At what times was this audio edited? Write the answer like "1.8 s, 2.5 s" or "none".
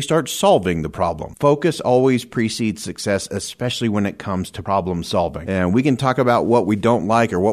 none